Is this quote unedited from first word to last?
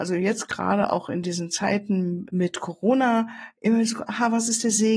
no; 1 cut; at 2.3 s

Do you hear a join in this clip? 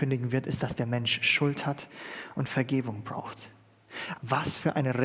yes; 1 cut; at 4.1 s

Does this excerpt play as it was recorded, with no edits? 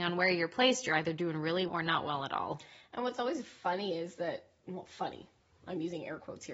no; 1 cut; at 1.7 s

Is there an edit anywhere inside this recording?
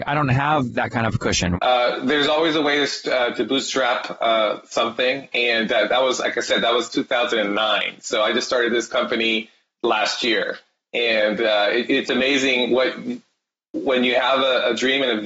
yes; 1 cut; at 1.6 s

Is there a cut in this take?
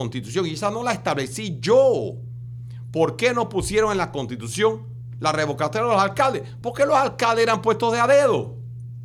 no; 0 cuts

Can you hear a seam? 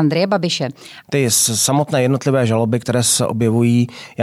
yes; 1 cut; at 1.0 s

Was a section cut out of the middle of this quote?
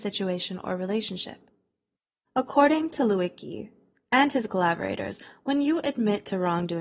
yes; 1 cut; at 2.3 s

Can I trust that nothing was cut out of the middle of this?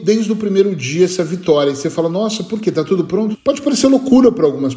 no; 1 cut; at 3.3 s

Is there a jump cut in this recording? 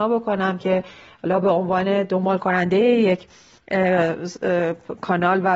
no; 0 cuts

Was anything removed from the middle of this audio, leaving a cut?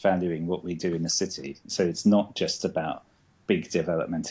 no; 0 cuts

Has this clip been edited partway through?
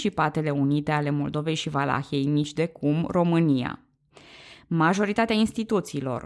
no; 0 cuts

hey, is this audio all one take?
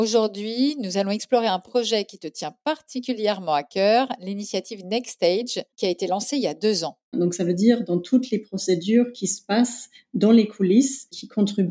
no; 1 cut; at 7.1 s

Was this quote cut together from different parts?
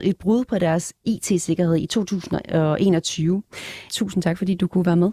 yes; 1 cut; at 3.9 s

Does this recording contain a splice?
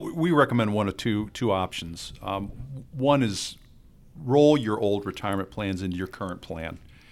no; 0 cuts

